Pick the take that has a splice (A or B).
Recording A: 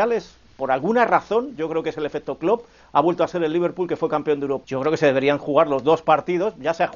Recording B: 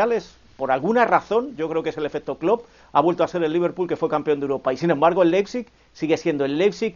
A